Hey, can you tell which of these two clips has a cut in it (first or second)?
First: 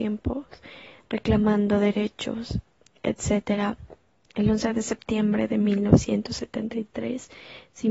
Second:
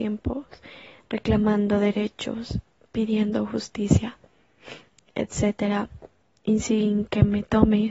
first